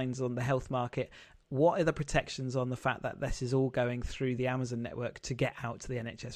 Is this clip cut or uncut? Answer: uncut